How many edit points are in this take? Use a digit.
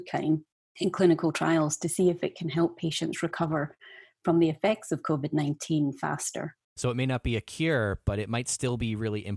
1